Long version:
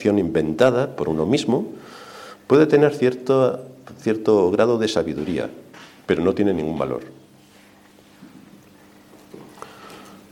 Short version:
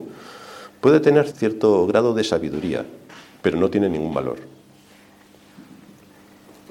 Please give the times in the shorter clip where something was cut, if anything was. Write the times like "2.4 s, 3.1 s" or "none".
1.3 s